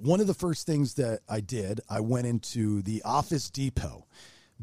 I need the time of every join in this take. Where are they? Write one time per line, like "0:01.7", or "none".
none